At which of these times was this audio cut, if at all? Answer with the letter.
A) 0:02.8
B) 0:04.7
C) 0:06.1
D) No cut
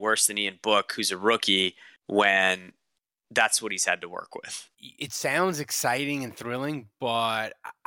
B